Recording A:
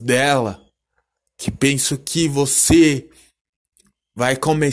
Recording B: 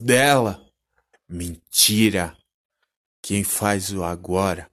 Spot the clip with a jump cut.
B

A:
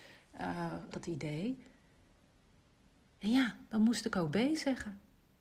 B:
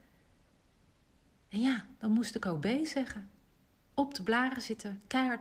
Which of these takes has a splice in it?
A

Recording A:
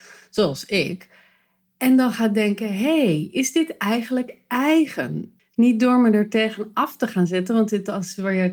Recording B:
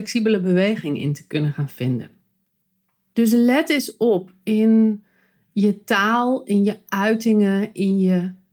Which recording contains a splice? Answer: A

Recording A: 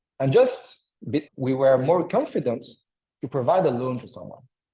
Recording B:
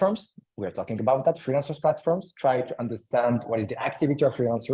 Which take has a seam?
A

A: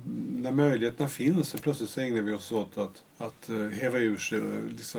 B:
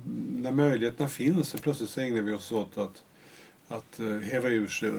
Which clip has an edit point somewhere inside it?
A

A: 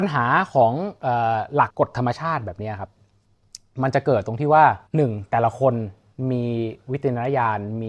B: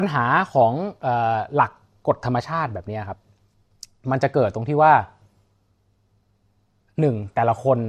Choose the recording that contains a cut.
A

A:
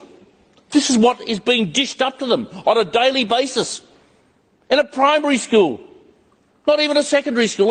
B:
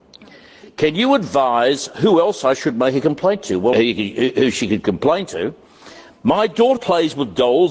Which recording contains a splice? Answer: B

